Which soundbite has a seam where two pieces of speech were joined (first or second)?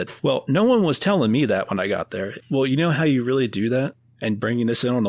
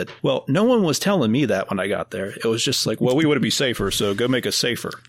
first